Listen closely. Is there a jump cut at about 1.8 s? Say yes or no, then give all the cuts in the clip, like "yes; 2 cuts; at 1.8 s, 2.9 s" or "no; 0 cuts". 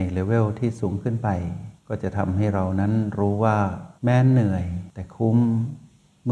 yes; 2 cuts; at 1.8 s, 4.0 s